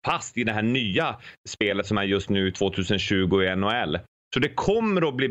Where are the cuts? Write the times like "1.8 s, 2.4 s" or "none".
none